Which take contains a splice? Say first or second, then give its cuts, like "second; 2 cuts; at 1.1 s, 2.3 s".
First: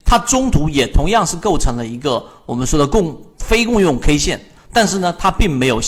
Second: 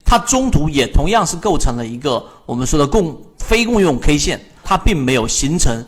second; 1 cut; at 4.6 s